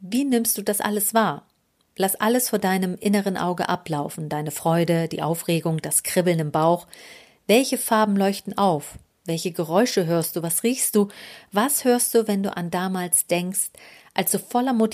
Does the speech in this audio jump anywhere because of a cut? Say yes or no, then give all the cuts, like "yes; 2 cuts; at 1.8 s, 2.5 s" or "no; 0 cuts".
no; 0 cuts